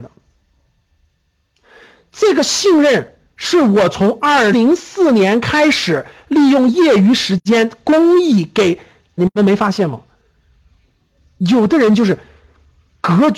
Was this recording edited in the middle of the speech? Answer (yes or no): yes